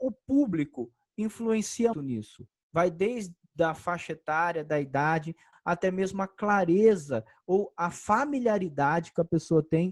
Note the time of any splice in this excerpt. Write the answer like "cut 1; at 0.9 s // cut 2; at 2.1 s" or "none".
cut 1; at 1.9 s // cut 2; at 5.5 s